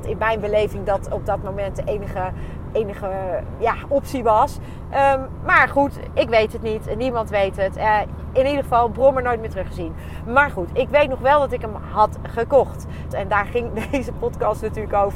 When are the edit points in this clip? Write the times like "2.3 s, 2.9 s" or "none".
13.1 s